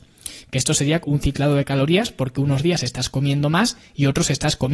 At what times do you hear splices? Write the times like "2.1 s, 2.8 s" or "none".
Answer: 1.0 s